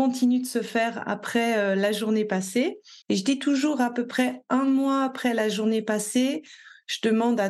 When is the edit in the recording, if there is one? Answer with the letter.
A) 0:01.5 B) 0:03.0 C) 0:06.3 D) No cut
B